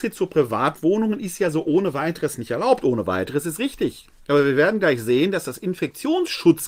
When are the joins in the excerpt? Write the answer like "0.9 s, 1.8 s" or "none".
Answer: none